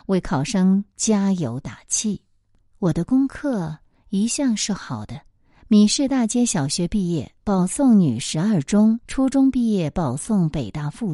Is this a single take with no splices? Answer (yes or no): no